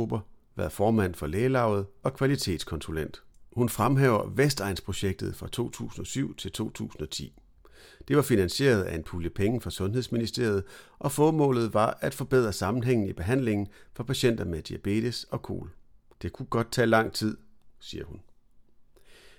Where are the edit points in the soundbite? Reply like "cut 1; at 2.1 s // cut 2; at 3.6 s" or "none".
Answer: cut 1; at 16.1 s // cut 2; at 17.7 s

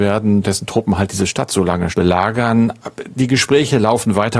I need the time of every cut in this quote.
cut 1; at 1.9 s

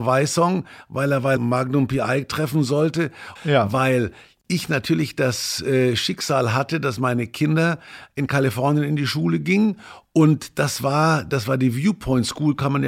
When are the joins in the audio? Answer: cut 1; at 1.4 s // cut 2; at 3.4 s

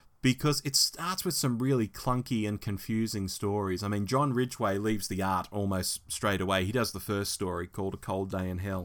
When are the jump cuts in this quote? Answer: none

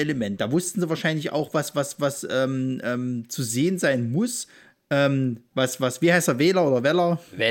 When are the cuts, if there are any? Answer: none

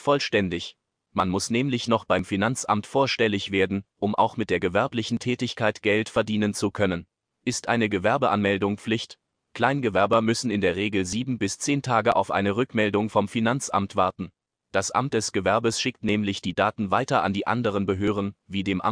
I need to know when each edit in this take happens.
none

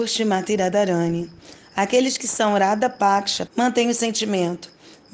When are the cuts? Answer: cut 1; at 3.5 s

